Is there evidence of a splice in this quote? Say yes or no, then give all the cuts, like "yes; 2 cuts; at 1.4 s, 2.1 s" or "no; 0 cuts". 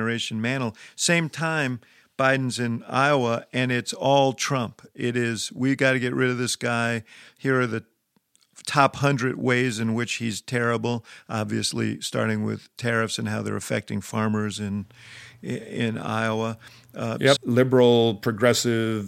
yes; 1 cut; at 17.4 s